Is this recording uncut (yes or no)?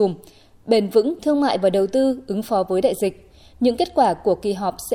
yes